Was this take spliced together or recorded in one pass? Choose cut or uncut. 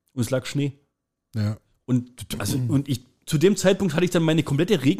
uncut